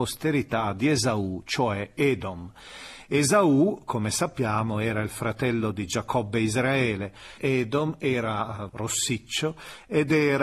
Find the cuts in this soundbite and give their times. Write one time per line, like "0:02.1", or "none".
0:07.4
0:08.7